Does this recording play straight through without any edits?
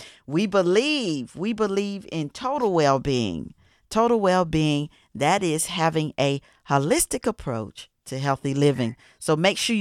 yes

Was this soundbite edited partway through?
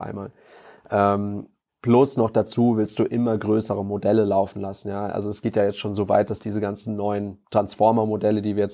no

